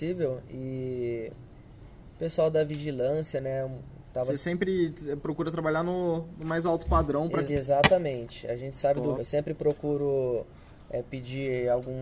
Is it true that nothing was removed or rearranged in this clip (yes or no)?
no